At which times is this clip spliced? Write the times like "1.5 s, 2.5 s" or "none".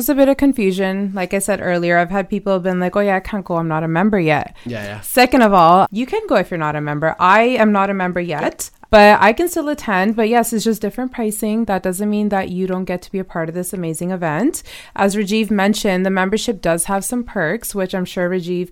4.7 s, 5.8 s, 8.9 s